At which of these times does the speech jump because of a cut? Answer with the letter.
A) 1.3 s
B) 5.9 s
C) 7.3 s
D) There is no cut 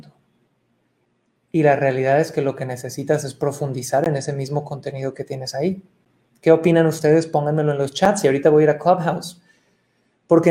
D